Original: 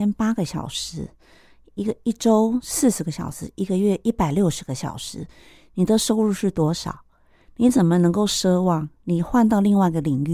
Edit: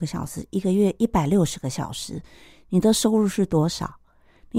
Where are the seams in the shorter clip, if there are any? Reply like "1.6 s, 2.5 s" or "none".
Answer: none